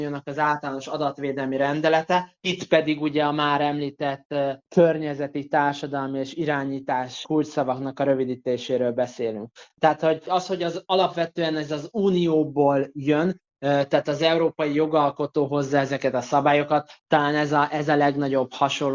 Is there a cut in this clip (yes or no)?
no